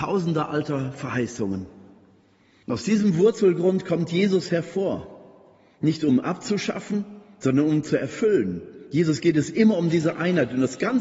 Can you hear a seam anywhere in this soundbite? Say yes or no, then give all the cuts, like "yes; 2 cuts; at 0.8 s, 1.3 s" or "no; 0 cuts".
no; 0 cuts